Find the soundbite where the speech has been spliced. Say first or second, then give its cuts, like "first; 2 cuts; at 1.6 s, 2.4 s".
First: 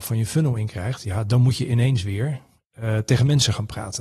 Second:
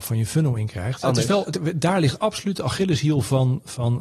second; 1 cut; at 1.0 s